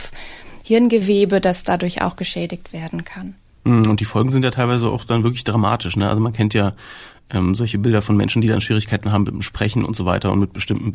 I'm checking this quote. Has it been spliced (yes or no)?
no